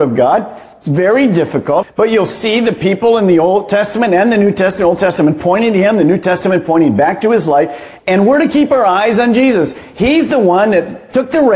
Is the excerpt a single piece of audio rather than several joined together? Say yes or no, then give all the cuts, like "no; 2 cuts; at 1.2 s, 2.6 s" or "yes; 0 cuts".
no; 2 cuts; at 1.8 s, 8.0 s